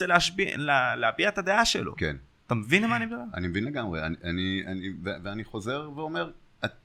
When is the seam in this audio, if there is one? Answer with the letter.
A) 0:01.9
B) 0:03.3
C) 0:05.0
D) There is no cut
D